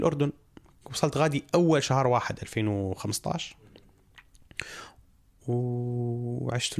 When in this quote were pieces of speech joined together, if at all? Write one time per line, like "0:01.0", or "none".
none